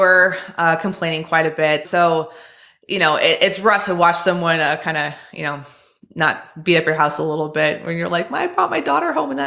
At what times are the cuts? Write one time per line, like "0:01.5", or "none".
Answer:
0:01.8